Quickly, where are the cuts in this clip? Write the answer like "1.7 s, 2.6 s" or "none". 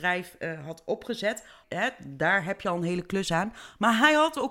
1.6 s